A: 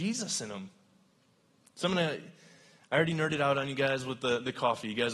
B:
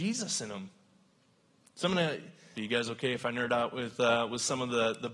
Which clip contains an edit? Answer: B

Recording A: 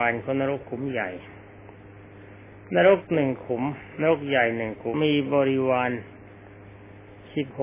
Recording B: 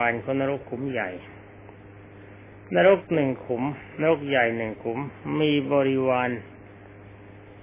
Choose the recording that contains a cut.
A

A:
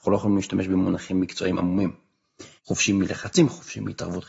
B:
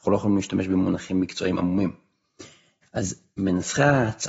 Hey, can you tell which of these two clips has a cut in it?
A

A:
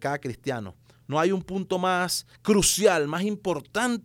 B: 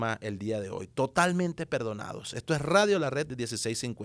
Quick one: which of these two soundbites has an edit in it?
A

